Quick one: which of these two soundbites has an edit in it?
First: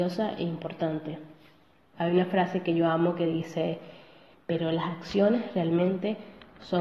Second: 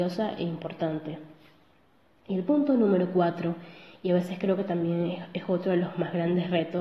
first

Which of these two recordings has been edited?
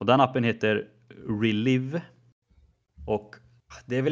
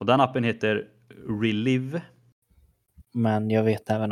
second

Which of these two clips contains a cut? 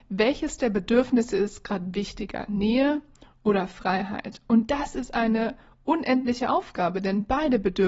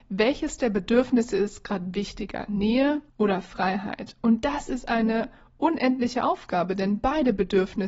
second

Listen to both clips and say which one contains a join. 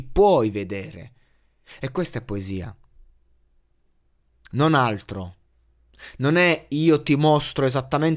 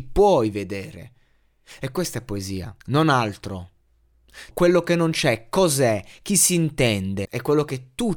second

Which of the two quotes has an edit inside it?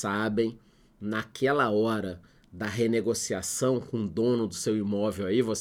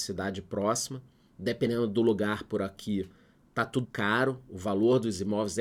second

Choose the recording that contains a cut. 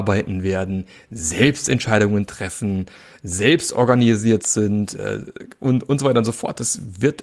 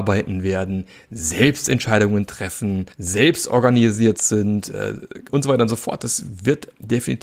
second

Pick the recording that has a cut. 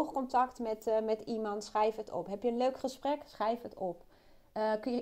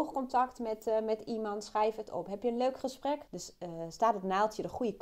second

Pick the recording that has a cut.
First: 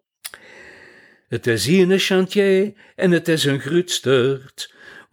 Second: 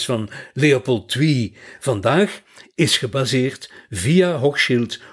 first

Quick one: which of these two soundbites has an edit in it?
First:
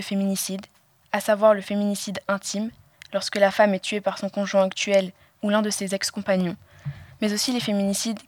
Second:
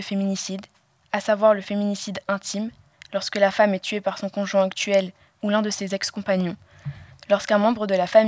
second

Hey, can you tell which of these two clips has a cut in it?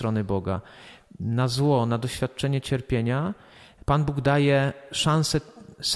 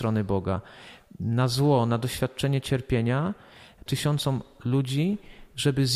second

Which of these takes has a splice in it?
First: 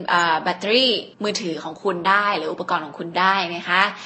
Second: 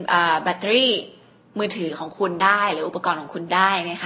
first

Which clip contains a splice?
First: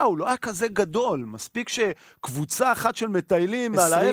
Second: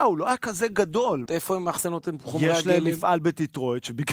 second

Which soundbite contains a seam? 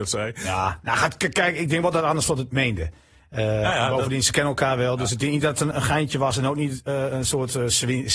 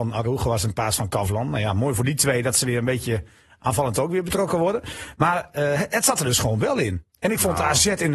first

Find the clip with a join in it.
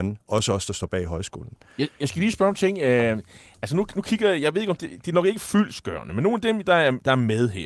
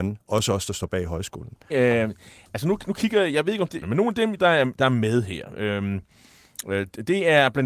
second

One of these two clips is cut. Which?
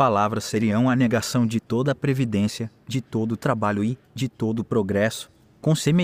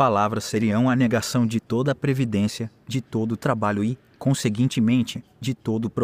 first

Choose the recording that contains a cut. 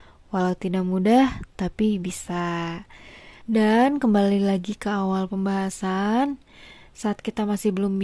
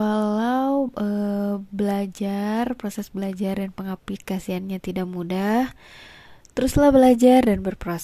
first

